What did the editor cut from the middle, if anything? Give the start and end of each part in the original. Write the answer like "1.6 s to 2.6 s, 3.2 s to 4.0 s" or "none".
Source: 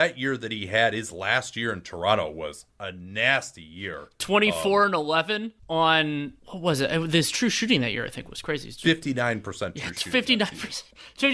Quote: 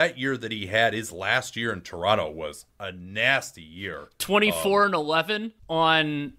none